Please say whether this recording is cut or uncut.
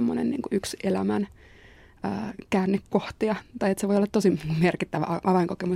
uncut